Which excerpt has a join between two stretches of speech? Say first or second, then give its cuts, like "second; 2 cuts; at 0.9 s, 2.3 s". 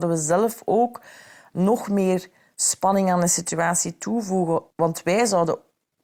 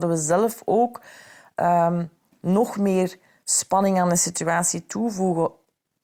first; 2 cuts; at 1.5 s, 4.7 s